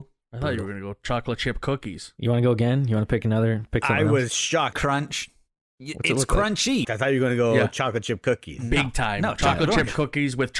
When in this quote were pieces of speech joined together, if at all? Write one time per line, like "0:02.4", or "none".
0:04.7
0:06.8